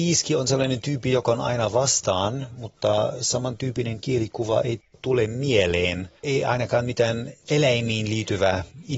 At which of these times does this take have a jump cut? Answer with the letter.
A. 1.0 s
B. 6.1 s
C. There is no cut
C